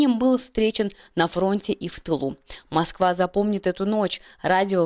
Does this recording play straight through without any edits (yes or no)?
yes